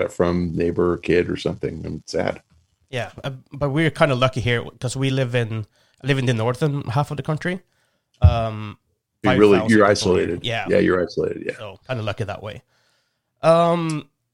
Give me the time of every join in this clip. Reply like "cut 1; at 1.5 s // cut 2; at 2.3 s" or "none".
cut 1; at 9.2 s // cut 2; at 11.8 s